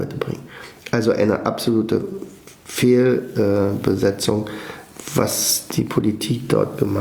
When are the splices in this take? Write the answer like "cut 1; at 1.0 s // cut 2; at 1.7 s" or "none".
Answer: none